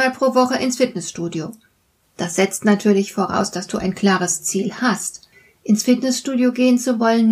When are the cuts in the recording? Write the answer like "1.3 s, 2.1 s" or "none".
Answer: 2.0 s

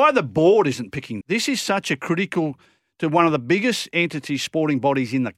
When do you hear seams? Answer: 1.2 s

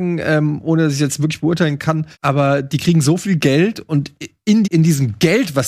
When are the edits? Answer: 2.1 s, 4.6 s

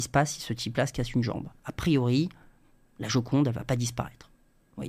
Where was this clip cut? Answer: none

